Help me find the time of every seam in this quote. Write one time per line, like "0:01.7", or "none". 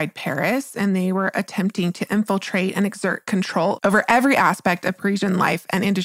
none